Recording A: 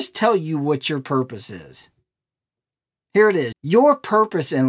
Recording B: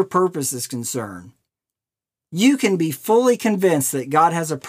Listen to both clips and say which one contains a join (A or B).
A